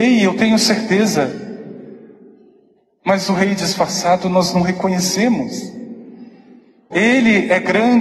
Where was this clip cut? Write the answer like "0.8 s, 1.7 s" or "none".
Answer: 6.9 s

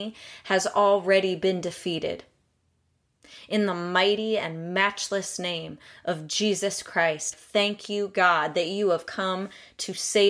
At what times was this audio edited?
7.3 s

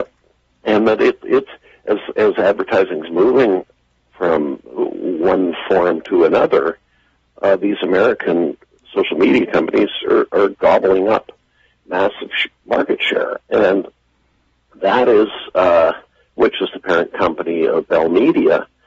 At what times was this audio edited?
16.4 s

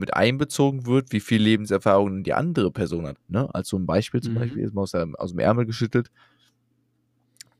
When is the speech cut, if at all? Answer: 3.1 s

